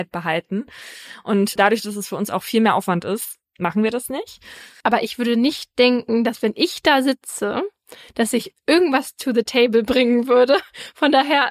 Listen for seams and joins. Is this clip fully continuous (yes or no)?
no